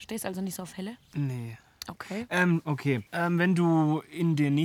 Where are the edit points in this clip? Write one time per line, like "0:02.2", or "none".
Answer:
0:03.1